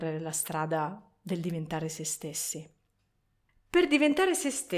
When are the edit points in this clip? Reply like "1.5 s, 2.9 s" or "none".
3.5 s